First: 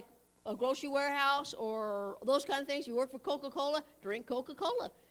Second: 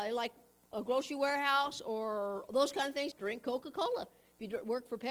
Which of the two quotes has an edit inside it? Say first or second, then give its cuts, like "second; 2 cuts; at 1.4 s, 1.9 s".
second; 1 cut; at 3.1 s